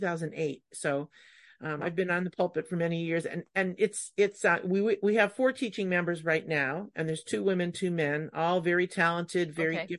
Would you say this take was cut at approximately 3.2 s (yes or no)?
no